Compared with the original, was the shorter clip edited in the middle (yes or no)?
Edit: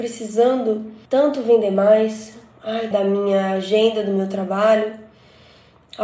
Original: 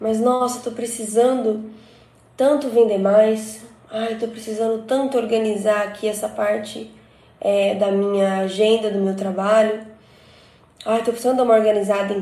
yes